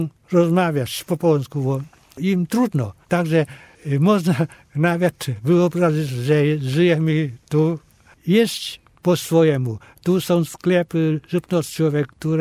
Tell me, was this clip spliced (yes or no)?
yes